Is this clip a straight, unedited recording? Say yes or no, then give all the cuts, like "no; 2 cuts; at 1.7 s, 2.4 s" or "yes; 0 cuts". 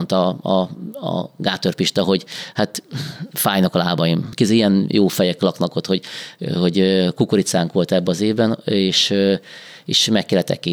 no; 1 cut; at 4.3 s